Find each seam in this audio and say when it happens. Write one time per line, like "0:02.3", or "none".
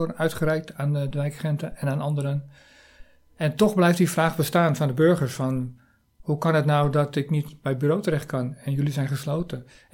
none